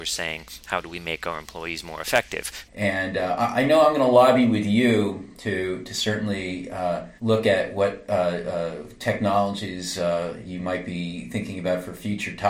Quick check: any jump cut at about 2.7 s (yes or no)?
yes